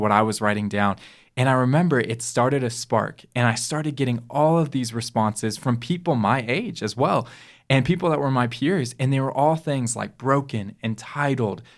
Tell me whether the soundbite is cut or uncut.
uncut